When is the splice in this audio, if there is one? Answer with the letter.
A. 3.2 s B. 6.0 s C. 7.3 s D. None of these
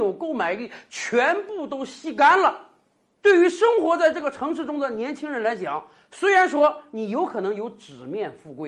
A